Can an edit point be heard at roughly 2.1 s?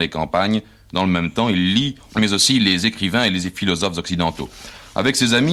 yes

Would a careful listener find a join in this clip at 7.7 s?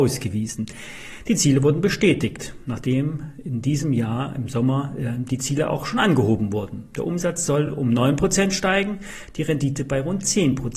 no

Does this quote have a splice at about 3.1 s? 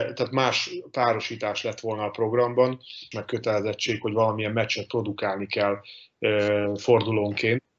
yes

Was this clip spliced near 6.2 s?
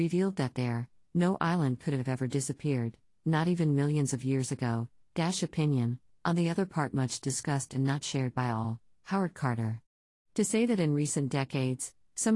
no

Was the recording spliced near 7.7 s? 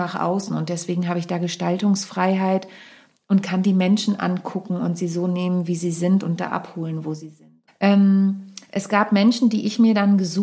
yes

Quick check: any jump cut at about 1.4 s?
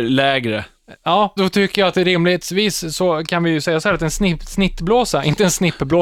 yes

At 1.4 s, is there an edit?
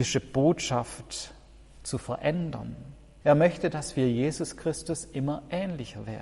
no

